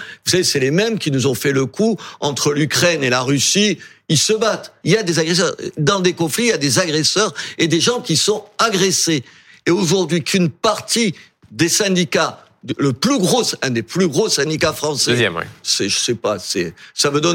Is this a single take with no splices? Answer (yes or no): no